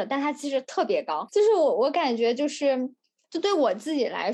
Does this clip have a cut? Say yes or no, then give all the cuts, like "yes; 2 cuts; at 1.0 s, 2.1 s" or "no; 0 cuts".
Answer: no; 0 cuts